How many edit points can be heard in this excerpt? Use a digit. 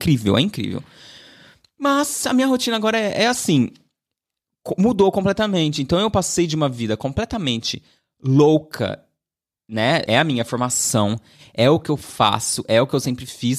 1